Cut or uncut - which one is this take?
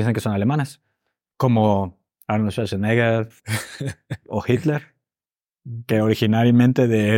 uncut